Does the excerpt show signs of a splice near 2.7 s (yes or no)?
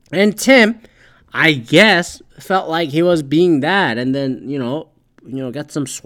no